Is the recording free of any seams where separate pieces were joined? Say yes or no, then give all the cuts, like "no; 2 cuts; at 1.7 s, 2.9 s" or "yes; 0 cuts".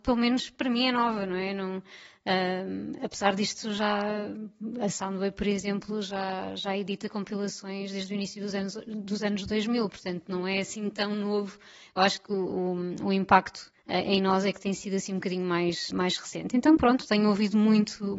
no; 2 cuts; at 13.8 s, 15.9 s